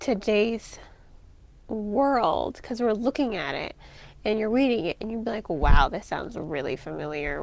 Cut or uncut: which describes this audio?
uncut